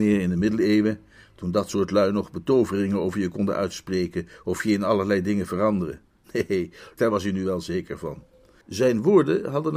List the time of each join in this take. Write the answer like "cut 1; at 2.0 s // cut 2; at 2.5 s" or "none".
cut 1; at 7.0 s // cut 2; at 8.6 s